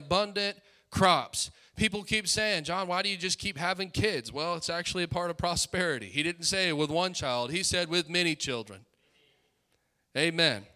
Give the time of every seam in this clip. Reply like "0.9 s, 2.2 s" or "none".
none